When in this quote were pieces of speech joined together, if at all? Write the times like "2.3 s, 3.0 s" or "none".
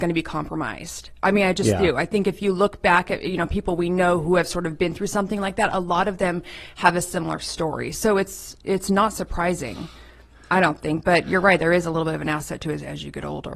none